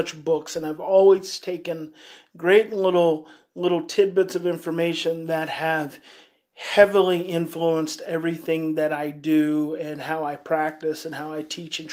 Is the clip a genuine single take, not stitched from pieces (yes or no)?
yes